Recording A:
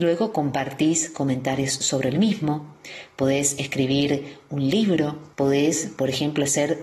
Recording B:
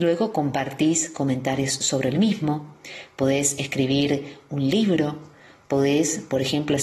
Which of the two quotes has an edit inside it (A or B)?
A